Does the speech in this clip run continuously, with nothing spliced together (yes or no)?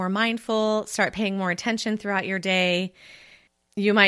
yes